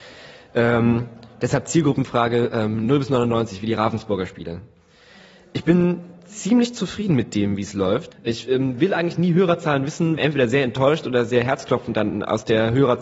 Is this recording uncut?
no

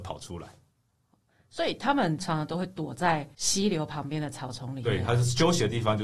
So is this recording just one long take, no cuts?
yes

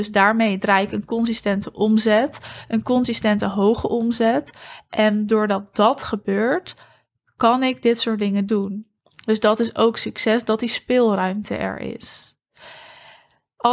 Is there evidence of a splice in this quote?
no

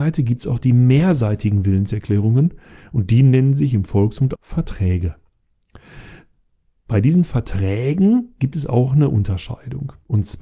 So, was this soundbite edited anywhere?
yes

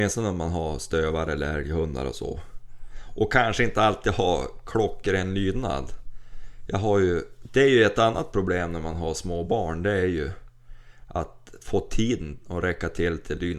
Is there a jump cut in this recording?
no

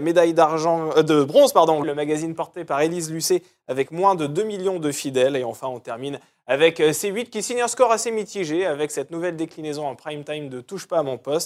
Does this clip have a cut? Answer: yes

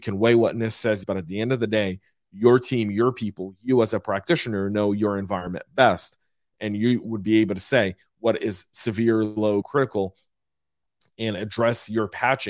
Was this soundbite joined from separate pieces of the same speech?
yes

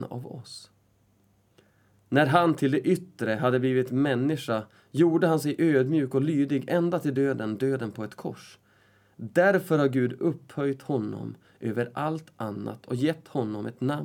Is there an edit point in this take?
no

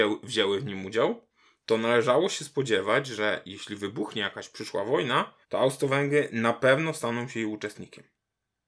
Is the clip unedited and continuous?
no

